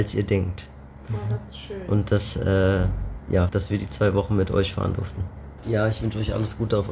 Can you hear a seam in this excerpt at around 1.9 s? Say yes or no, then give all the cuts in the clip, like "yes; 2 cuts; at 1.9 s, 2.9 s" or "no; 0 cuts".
no; 2 cuts; at 3.5 s, 5.6 s